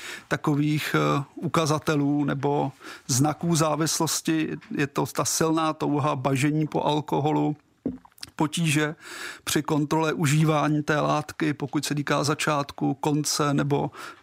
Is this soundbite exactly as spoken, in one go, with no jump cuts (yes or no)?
yes